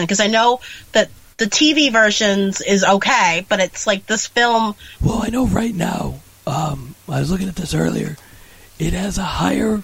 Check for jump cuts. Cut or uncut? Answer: cut